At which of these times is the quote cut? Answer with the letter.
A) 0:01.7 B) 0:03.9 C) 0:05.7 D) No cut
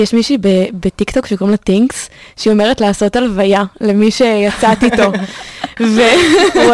D